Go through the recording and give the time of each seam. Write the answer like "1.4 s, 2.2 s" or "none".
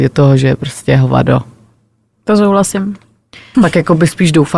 3.5 s